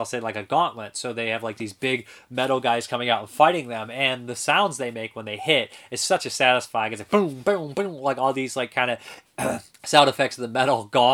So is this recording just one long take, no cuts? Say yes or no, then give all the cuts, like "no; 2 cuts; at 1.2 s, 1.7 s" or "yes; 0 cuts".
no; 1 cut; at 9.7 s